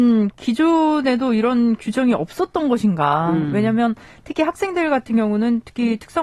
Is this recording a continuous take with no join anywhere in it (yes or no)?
yes